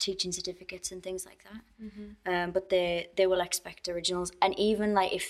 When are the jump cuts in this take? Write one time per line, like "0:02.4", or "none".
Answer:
none